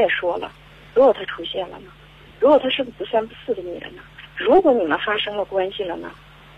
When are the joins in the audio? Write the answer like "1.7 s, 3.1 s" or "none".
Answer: none